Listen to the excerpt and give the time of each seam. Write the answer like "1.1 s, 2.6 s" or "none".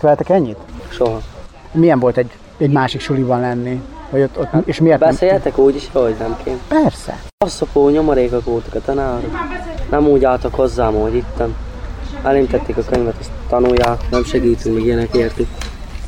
none